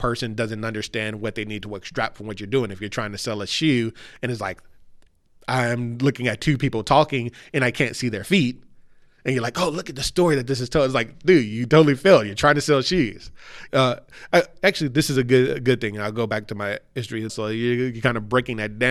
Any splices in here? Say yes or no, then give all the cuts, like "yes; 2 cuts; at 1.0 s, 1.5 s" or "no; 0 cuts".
yes; 2 cuts; at 13.7 s, 17.3 s